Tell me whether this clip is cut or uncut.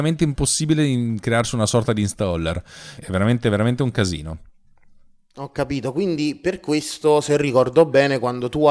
cut